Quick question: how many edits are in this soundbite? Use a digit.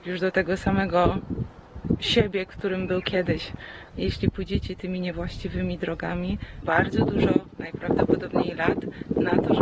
2